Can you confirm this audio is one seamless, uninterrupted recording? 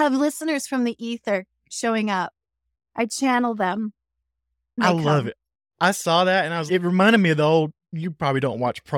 no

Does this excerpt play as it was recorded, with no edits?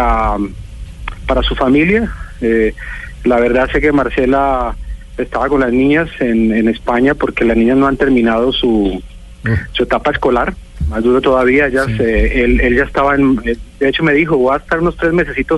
no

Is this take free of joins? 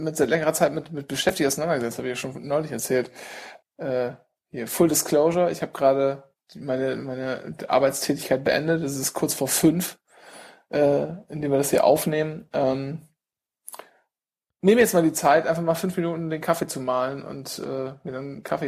no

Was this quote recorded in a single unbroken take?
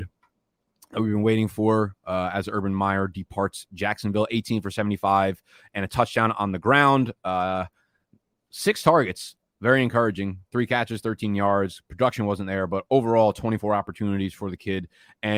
yes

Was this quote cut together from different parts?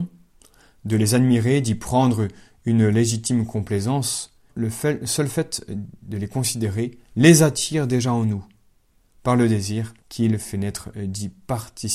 yes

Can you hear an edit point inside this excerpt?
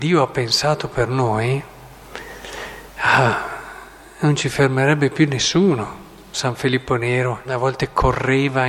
yes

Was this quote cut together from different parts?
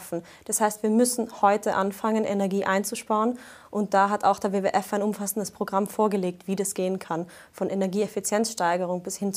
no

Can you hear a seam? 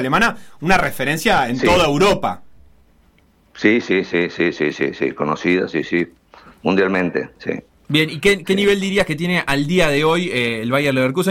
no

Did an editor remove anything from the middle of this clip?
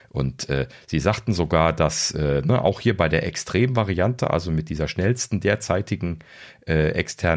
no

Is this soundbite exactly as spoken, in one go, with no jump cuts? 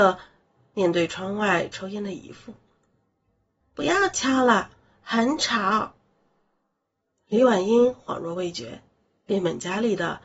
no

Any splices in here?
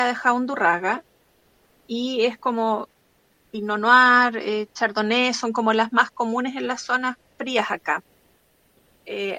no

